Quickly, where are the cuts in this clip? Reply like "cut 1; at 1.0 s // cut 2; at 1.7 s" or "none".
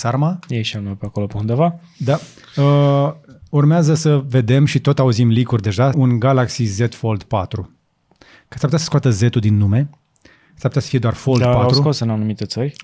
cut 1; at 5.9 s